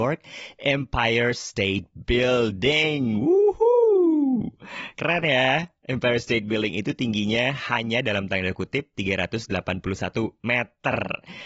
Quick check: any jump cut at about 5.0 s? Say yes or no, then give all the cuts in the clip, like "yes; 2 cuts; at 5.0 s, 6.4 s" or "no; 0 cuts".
no; 0 cuts